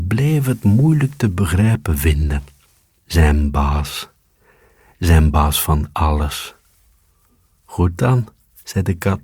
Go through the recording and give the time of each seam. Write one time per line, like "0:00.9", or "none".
none

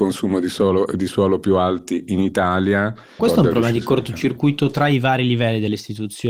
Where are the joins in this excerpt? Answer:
0:03.2

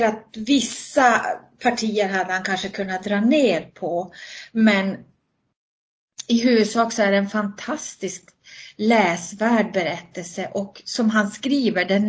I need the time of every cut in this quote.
none

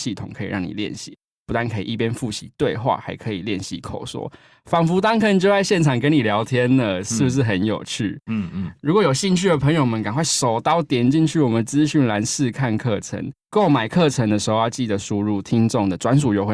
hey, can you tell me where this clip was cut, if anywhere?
none

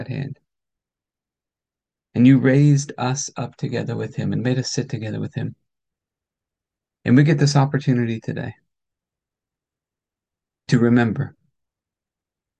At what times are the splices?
none

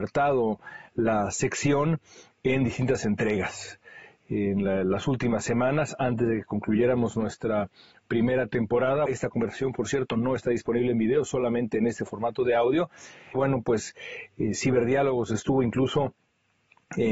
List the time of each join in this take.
0:09.1
0:13.3

